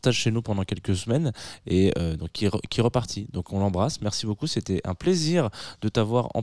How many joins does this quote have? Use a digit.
0